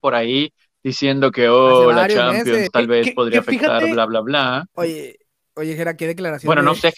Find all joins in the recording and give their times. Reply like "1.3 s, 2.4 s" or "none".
2.7 s, 4.7 s